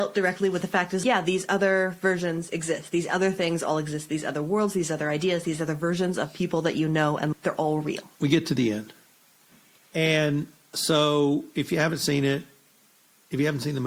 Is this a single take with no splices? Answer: no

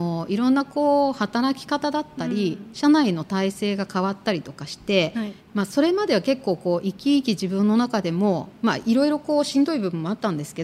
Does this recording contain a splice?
no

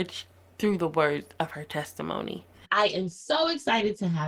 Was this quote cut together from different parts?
yes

